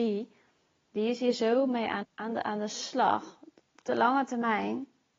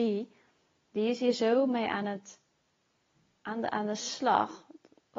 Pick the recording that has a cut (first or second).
first